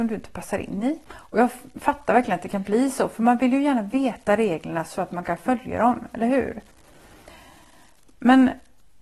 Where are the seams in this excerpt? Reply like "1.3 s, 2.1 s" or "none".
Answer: 1.1 s